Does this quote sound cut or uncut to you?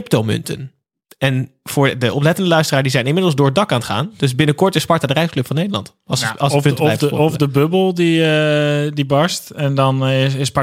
uncut